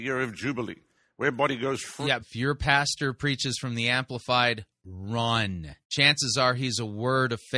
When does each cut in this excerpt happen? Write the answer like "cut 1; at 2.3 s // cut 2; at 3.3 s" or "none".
cut 1; at 2.2 s // cut 2; at 5.8 s